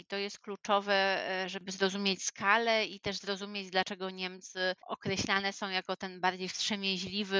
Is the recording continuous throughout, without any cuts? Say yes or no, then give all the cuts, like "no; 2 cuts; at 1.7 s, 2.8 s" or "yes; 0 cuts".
no; 1 cut; at 4.8 s